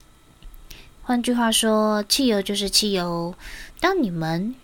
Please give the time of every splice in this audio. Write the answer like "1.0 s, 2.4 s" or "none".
1.0 s, 3.7 s